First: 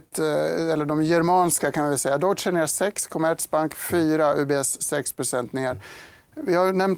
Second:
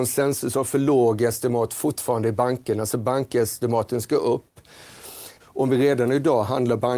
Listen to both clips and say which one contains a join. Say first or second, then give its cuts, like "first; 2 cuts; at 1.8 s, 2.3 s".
second; 1 cut; at 5.4 s